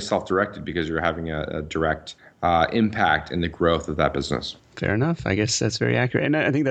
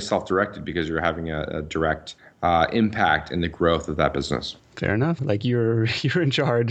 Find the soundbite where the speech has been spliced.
second; 1 cut; at 5.2 s

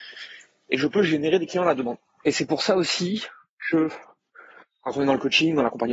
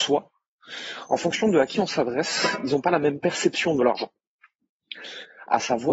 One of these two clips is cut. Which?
first; 1 cut; at 2.2 s

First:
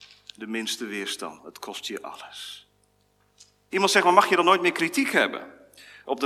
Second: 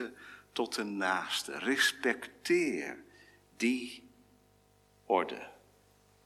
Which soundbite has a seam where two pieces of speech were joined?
first; 2 cuts; at 1.4 s, 3.7 s

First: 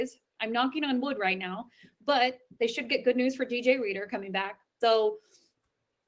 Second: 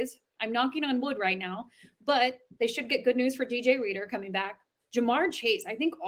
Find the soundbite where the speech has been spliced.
first; 1 cut; at 4.8 s

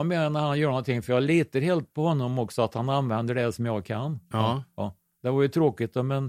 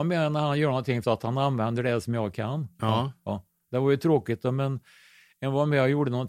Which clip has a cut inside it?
second; 1 cut; at 1.0 s

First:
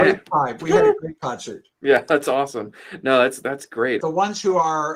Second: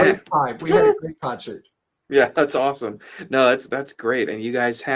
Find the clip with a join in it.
first; 2 cuts; at 1.7 s, 4.0 s

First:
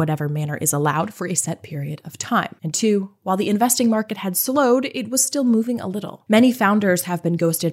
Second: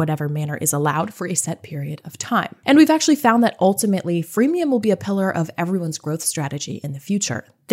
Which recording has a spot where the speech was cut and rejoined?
first; 1 cut; at 2.6 s

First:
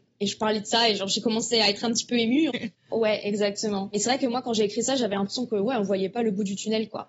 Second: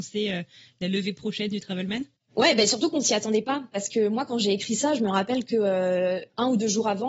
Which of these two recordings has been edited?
first; 1 cut; at 2.5 s

